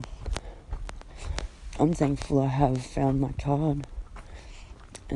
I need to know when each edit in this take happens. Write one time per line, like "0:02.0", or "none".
0:01.9